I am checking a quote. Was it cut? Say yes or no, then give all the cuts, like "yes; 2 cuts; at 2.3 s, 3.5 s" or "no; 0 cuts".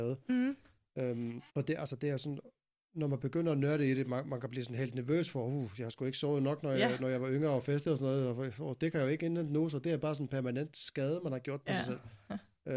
yes; 1 cut; at 1.5 s